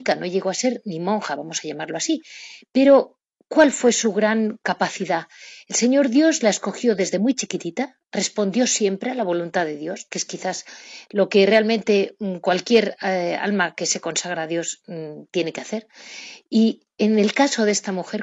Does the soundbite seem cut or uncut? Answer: uncut